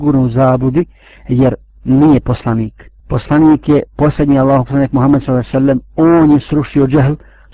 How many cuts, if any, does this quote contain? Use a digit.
1